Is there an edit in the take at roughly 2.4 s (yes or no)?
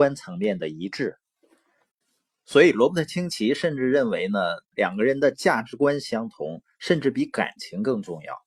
no